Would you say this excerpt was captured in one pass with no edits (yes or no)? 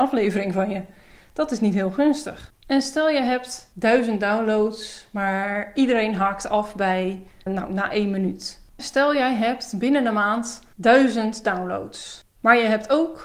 no